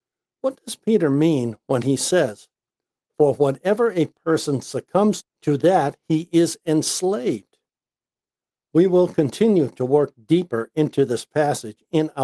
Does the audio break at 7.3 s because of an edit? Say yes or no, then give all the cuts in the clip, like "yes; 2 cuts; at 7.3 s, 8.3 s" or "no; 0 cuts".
no; 2 cuts; at 5.2 s, 8.6 s